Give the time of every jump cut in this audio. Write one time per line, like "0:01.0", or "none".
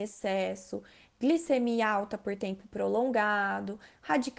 none